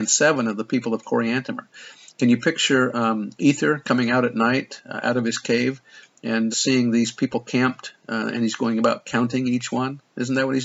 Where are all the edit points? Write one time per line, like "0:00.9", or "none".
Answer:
0:06.5